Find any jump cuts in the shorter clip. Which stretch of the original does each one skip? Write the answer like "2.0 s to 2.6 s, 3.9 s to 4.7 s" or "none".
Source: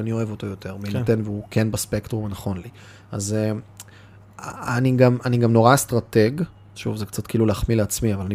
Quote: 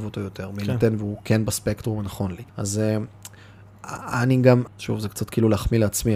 2.8 s to 3.0 s, 5.2 s to 6.6 s